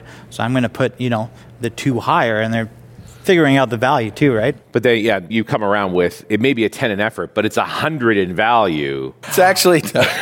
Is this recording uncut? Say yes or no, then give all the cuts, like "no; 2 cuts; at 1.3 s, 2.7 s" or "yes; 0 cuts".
no; 2 cuts; at 5.3 s, 9.2 s